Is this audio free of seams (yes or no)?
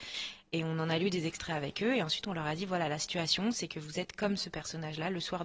yes